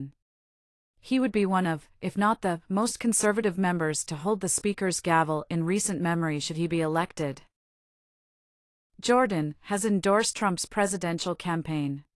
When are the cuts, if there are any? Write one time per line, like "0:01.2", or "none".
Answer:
0:08.8